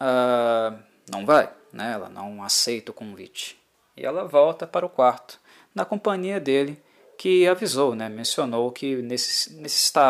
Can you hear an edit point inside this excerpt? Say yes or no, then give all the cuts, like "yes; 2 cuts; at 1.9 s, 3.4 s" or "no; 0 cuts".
no; 0 cuts